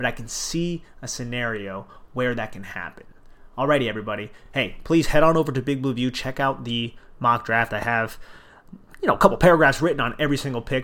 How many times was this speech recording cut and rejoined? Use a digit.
0